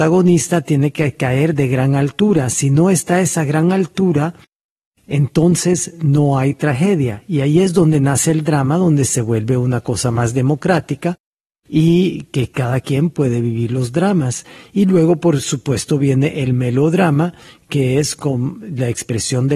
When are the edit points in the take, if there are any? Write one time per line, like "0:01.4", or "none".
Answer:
none